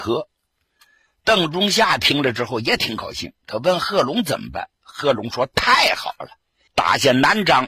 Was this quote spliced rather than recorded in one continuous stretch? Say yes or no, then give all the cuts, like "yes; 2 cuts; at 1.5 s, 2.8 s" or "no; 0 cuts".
yes; 1 cut; at 6.7 s